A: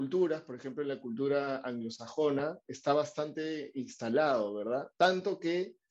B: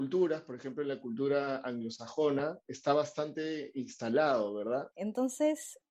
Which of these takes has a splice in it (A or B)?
B